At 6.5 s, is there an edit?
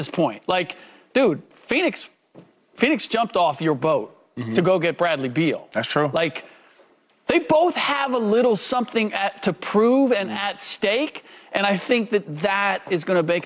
no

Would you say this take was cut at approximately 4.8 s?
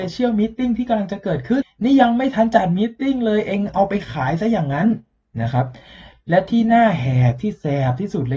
no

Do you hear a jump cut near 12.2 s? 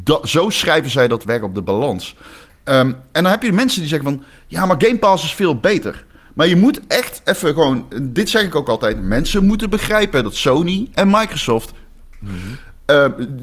yes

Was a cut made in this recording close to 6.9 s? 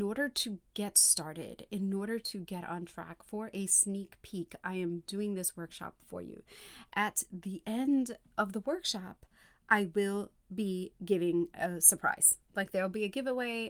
no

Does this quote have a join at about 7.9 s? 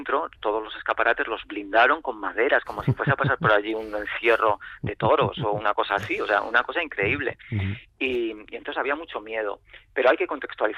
no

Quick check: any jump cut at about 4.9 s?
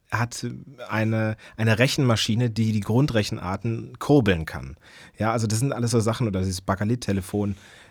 no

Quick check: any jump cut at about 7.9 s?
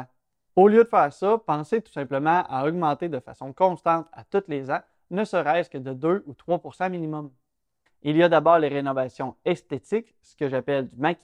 yes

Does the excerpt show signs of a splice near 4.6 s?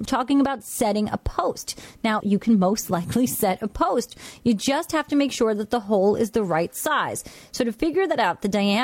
no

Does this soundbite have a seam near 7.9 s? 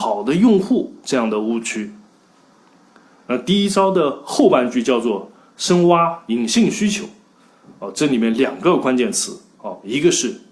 no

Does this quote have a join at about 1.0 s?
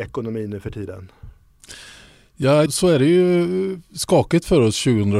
no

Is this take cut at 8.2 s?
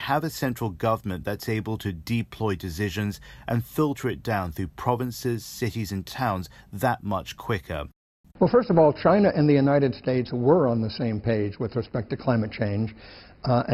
yes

